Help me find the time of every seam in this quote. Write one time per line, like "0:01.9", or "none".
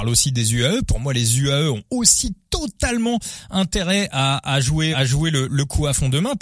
0:04.9

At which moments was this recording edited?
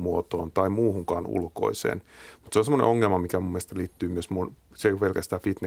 none

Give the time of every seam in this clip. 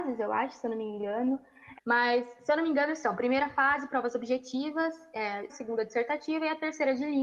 0:01.7
0:05.5

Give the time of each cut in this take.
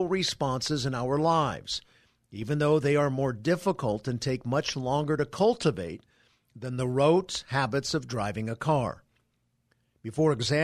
none

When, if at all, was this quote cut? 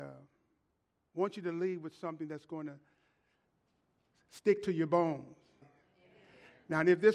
0:05.6

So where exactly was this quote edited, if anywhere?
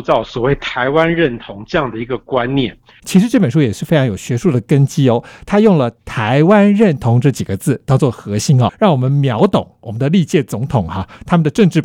0:03.0
0:08.7

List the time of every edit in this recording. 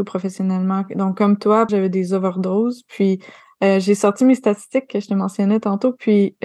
0:01.7

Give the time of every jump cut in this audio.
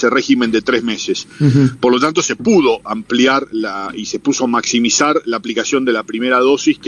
none

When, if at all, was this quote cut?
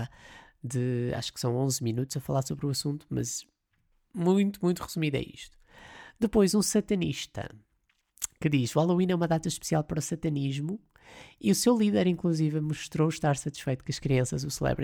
none

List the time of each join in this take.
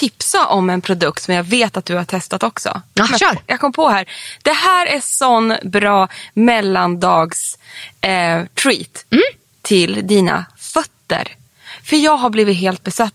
none

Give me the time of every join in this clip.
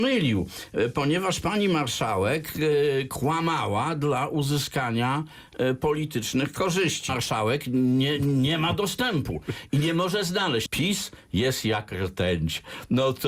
0:07.1
0:10.7

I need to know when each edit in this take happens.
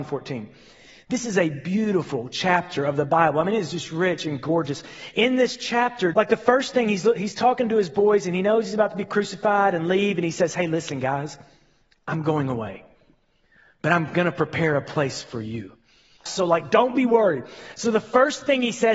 0:06.1
0:16.3

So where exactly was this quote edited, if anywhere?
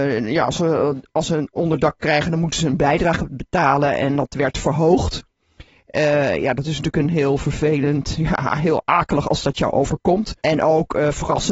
0:10.4

